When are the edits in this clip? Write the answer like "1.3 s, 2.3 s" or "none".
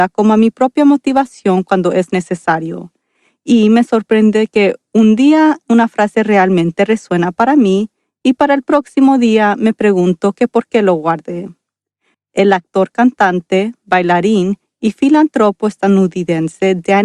12.1 s